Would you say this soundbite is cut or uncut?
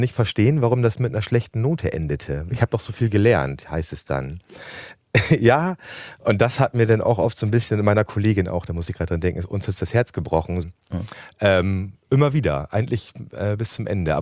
cut